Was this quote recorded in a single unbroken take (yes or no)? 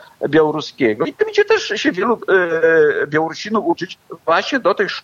yes